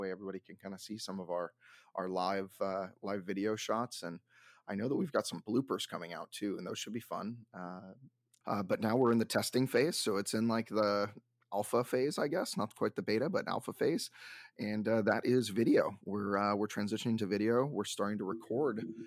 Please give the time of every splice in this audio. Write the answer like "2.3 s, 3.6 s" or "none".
8.4 s